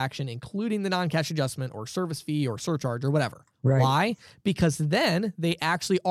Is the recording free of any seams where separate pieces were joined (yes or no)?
no